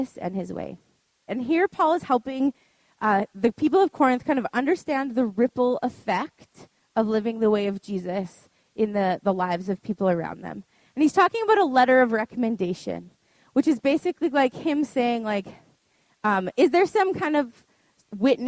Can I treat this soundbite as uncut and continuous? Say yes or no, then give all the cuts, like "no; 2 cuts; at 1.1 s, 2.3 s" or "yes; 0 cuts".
no; 1 cut; at 1.3 s